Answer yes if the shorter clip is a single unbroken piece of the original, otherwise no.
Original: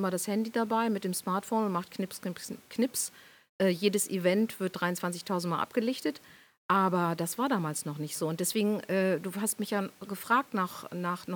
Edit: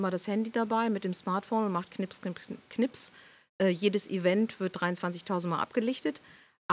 yes